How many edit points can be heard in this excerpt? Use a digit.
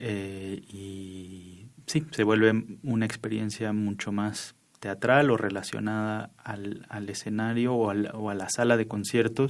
0